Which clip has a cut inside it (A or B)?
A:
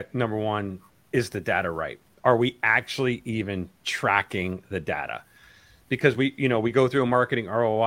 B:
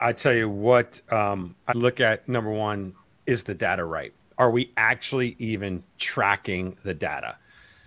B